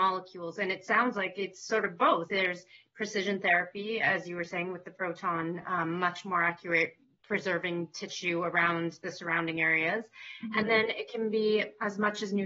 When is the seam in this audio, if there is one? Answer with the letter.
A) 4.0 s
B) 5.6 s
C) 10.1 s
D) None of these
D